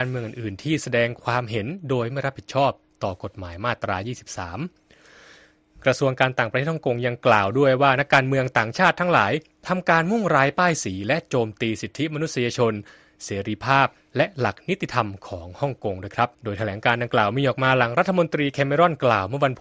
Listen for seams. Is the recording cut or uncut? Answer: cut